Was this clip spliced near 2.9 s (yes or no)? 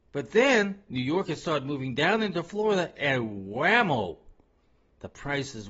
no